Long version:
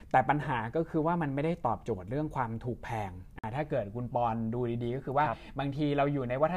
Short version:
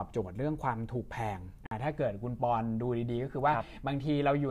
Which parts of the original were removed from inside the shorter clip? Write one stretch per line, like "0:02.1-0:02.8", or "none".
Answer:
none